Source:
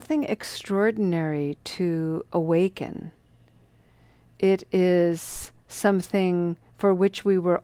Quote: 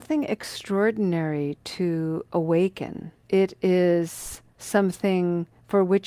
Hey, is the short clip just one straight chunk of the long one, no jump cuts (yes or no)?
no